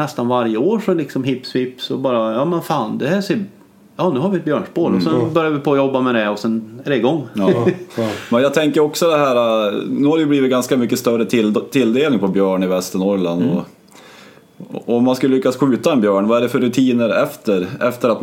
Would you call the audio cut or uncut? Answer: uncut